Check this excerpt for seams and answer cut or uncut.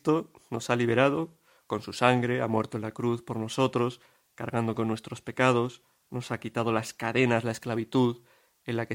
uncut